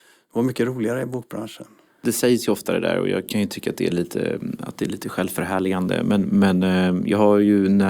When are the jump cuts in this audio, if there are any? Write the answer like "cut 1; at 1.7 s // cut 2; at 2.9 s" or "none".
cut 1; at 1.9 s